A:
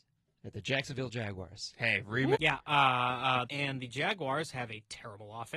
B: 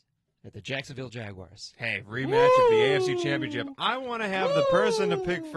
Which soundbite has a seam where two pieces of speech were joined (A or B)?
A